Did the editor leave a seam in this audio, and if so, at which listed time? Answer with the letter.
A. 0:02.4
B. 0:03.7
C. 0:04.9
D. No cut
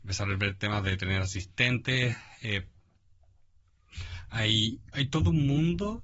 C